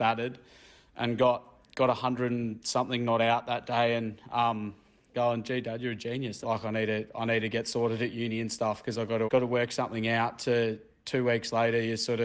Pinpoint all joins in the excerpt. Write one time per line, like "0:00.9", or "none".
0:05.1
0:06.4
0:09.3